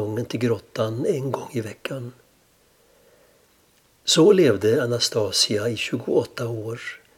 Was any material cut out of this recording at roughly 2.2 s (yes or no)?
no